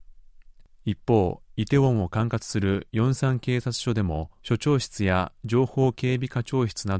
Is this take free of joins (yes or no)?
no